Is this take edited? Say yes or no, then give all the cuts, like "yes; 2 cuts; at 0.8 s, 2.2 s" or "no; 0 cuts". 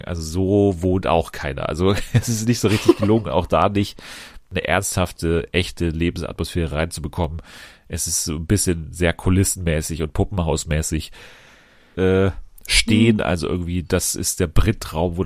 yes; 1 cut; at 11.9 s